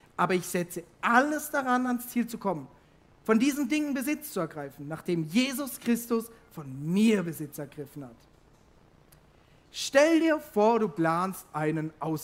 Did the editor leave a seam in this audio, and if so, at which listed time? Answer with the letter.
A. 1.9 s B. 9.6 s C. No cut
C